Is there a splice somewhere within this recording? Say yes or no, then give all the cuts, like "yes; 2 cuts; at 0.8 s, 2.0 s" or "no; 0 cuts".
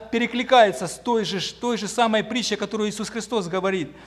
no; 0 cuts